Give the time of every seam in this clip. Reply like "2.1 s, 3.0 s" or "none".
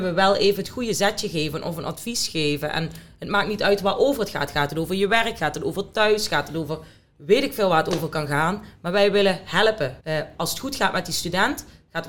10.0 s